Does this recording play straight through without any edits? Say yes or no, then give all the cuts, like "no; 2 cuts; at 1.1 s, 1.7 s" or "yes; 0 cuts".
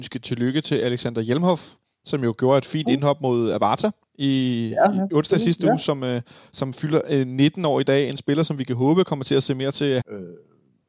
no; 1 cut; at 10.0 s